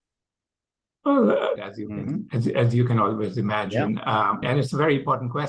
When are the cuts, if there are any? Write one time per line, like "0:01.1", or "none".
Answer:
0:01.6
0:04.4

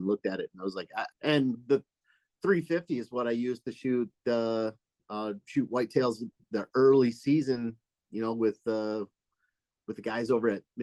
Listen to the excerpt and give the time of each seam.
0:01.1

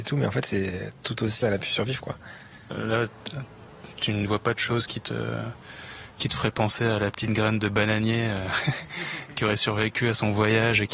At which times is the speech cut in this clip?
0:01.4
0:02.7

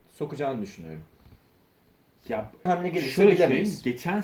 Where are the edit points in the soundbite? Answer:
0:02.7

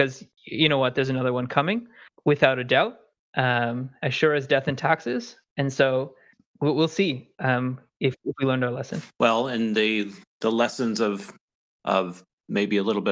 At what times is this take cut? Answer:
0:06.4

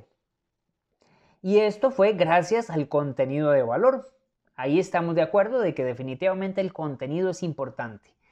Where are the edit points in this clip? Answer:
none

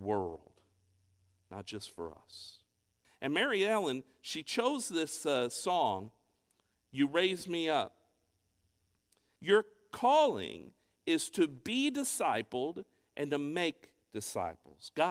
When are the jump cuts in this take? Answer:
0:03.0
0:09.4

